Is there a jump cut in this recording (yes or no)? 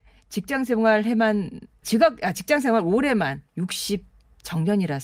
yes